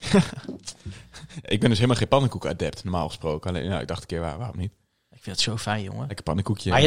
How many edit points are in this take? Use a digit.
0